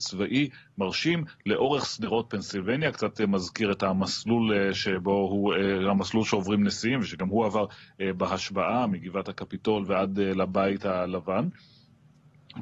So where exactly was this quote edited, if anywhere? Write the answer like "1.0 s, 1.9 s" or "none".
none